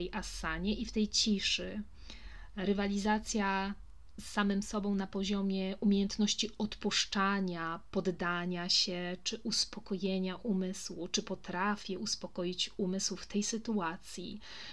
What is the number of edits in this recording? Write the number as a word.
zero